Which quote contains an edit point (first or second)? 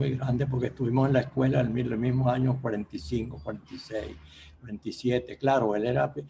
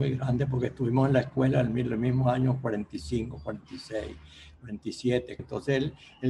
second